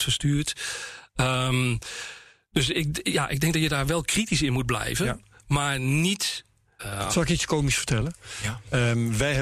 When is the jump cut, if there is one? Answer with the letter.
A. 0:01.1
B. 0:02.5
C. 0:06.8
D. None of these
C